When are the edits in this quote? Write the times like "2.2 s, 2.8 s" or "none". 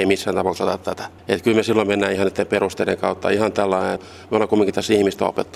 1.2 s, 4.0 s

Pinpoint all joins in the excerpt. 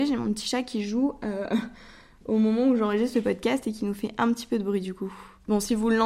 none

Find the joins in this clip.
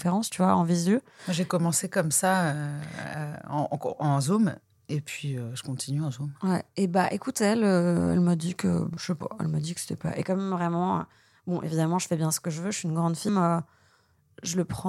13.3 s

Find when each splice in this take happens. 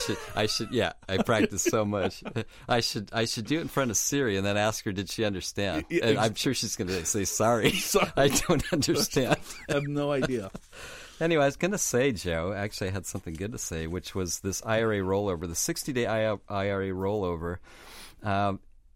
none

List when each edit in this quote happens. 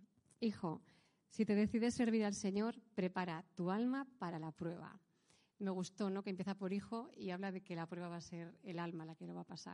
none

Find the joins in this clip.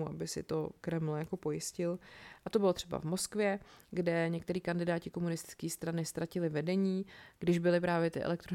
2.4 s

